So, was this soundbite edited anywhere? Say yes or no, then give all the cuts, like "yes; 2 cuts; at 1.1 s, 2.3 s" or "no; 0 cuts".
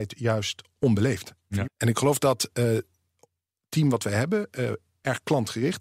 yes; 1 cut; at 1.6 s